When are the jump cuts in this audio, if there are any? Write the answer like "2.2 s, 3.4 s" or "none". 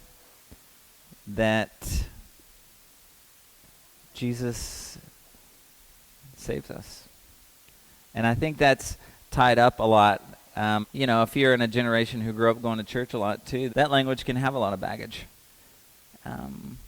10.8 s, 13.7 s